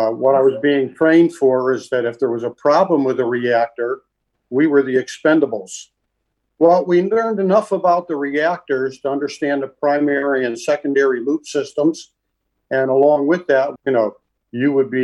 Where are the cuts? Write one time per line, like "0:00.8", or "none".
0:13.8